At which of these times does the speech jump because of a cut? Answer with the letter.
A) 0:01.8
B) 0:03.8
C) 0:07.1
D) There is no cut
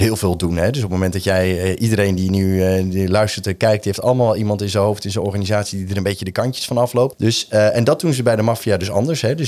C